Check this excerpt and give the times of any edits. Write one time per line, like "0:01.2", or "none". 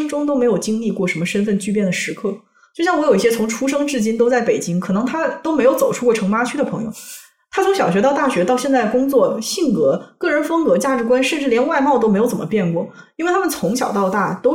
none